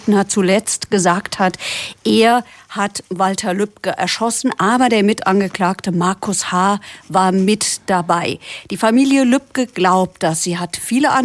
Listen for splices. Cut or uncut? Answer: uncut